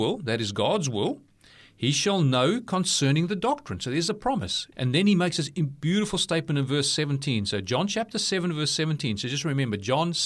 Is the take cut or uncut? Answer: cut